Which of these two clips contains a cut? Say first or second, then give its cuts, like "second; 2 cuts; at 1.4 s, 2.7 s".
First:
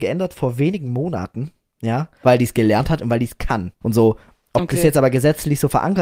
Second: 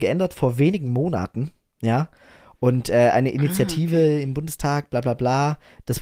first; 2 cuts; at 2.2 s, 3.8 s